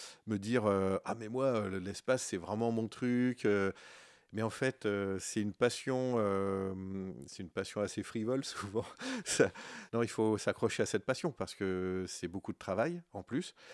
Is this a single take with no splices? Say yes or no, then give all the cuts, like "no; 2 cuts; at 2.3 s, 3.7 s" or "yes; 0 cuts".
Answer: no; 1 cut; at 9.9 s